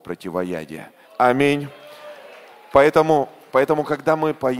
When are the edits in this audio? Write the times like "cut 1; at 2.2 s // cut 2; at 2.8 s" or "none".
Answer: cut 1; at 1.0 s